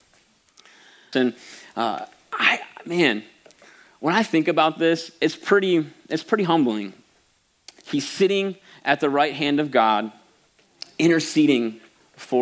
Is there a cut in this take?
yes; 2 cuts; at 1.1 s, 7.8 s

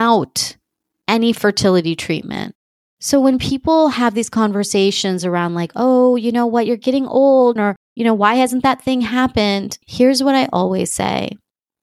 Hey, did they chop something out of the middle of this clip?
yes; 2 cuts; at 7.6 s, 9.8 s

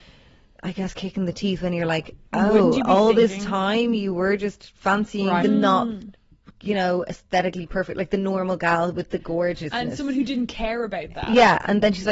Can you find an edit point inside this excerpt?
yes; 1 cut; at 5.4 s

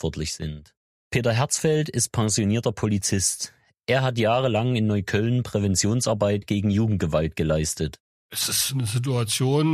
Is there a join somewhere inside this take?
no; 0 cuts

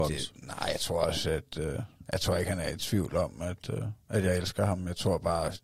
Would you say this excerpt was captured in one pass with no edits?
no; 1 cut; at 4.0 s

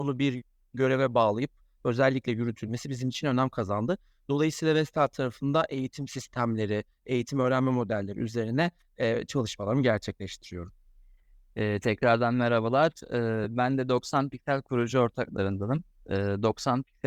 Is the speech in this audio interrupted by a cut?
no; 0 cuts

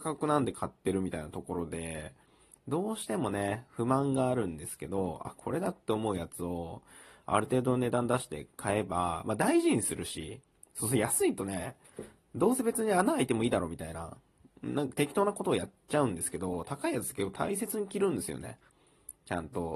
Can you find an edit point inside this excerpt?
no; 0 cuts

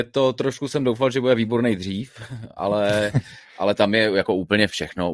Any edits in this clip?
no; 0 cuts

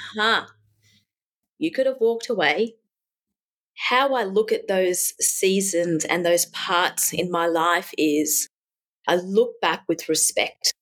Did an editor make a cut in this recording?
yes; 1 cut; at 1.4 s

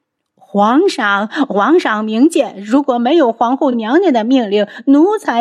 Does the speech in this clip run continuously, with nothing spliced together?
yes; 0 cuts

